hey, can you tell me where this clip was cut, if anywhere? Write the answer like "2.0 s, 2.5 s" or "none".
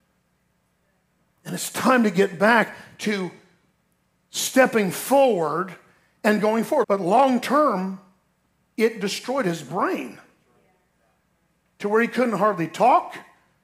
6.8 s